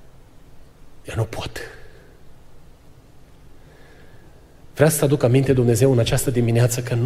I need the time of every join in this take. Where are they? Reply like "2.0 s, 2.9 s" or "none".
none